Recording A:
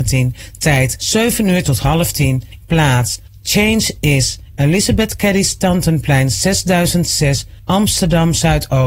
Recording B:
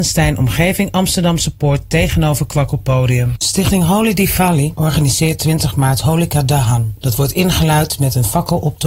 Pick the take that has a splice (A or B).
A